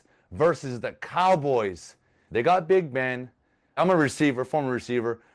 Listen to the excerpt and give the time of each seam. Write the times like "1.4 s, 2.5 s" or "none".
2.3 s, 3.8 s

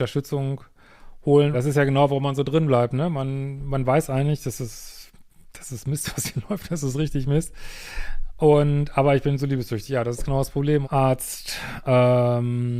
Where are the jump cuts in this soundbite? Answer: 1.5 s, 10.8 s

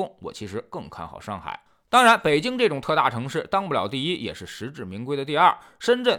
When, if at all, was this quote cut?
none

